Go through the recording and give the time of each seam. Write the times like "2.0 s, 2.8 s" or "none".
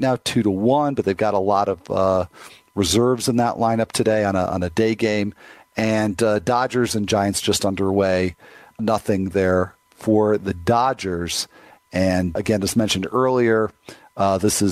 8.8 s, 12.4 s